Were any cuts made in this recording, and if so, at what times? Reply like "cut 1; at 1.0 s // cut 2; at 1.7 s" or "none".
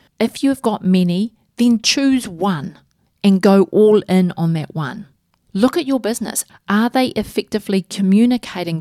cut 1; at 6.5 s